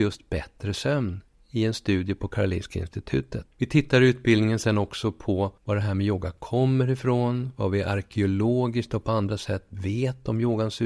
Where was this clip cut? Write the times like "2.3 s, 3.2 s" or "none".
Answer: 3.5 s, 5.6 s

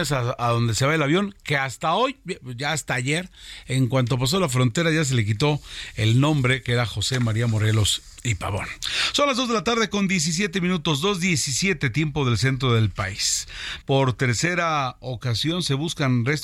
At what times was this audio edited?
13.8 s

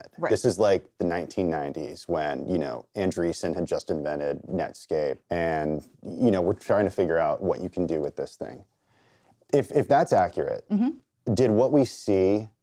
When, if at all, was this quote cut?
5.2 s

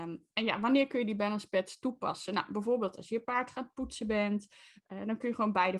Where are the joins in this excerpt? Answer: none

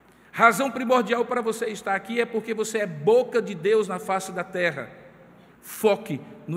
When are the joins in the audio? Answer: 5.5 s

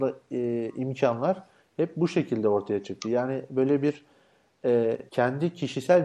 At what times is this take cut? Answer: 5.1 s

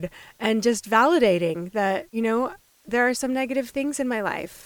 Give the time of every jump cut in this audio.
2.1 s

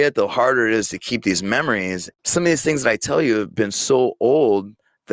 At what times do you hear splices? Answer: 2.1 s

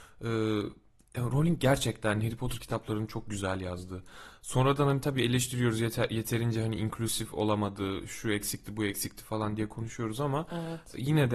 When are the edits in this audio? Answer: none

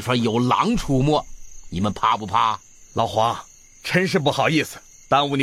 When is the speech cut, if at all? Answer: 2.8 s

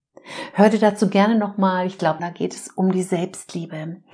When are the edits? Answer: 2.2 s

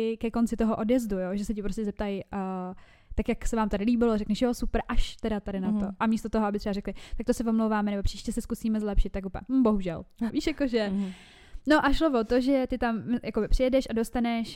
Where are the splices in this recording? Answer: 10.3 s

